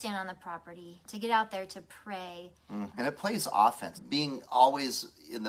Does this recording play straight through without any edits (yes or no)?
no